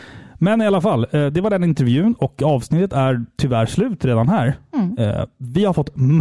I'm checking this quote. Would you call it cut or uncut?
uncut